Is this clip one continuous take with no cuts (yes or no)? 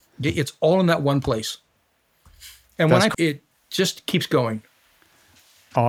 no